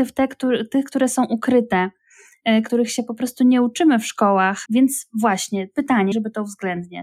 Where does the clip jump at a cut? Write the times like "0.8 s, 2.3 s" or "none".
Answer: 4.7 s, 6.1 s